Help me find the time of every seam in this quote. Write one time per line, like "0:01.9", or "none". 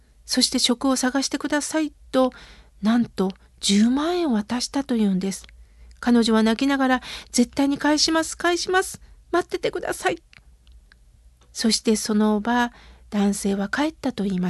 none